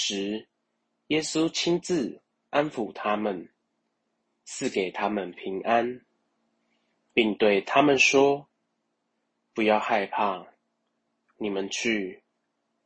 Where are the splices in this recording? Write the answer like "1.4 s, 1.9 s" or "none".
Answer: none